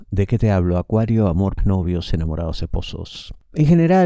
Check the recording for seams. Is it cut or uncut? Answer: cut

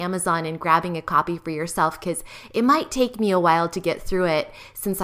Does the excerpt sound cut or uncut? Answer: uncut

